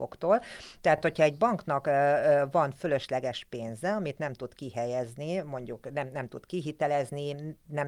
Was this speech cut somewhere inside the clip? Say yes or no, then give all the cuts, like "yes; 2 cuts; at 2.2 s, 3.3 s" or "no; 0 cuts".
no; 0 cuts